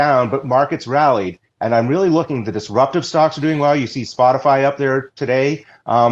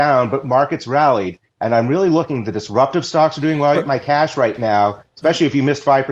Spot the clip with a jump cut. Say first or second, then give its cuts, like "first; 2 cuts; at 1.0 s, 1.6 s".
second; 1 cut; at 3.7 s